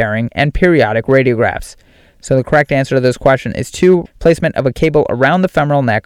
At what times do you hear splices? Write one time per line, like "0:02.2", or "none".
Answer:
0:04.0